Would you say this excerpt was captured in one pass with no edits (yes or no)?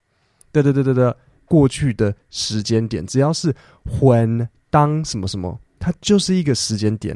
no